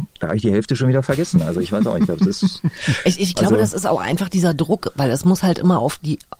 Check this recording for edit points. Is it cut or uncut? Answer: uncut